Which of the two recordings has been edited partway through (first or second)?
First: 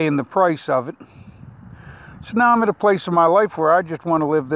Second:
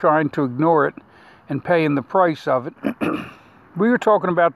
second